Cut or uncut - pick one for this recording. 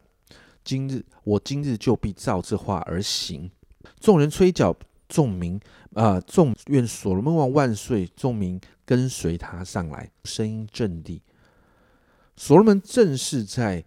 cut